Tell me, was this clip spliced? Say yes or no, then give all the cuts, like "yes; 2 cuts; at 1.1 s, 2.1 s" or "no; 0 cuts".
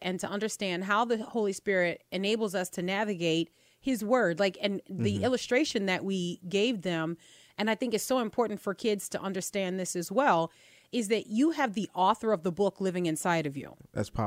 no; 0 cuts